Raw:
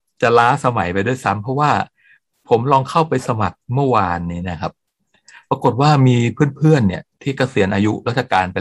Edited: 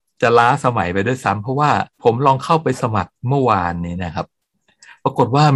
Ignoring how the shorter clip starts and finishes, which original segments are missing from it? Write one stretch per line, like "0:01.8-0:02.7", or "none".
0:01.9-0:02.4